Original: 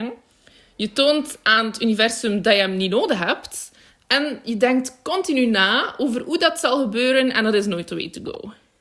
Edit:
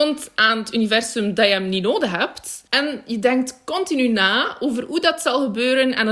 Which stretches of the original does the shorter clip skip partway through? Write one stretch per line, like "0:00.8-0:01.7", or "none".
0:03.7-0:04.0